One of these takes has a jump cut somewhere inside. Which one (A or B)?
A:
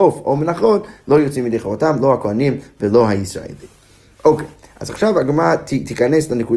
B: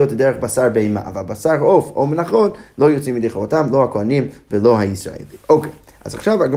B